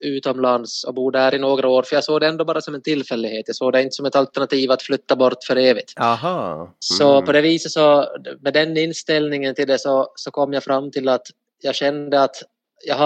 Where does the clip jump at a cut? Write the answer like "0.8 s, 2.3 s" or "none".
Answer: none